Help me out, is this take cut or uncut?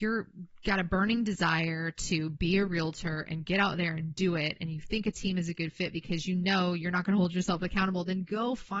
uncut